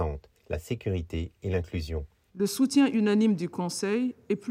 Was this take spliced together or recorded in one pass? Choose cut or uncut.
cut